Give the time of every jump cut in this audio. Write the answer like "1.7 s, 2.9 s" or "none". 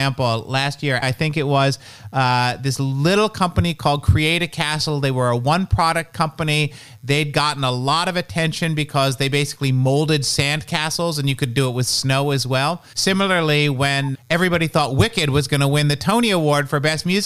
1.0 s, 12.9 s, 14.1 s